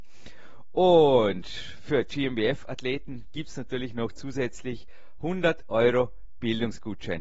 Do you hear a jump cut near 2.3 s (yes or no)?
no